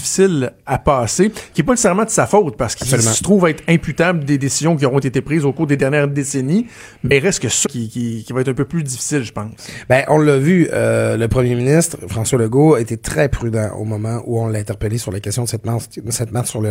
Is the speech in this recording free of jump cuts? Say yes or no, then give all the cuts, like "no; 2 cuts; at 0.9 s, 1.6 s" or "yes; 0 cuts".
no; 1 cut; at 7.6 s